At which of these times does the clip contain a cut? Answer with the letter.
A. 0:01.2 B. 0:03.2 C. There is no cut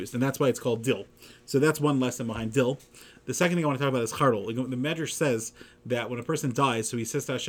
C